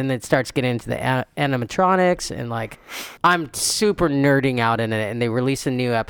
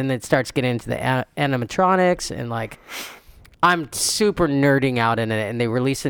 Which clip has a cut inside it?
first; 1 cut; at 3.2 s

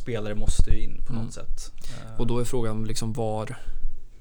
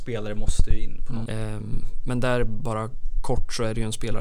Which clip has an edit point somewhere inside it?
second; 1 cut; at 1.3 s

